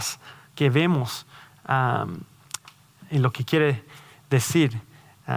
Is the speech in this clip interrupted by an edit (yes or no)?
no